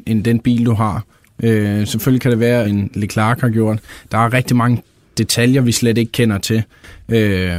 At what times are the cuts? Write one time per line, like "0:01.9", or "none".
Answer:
0:02.6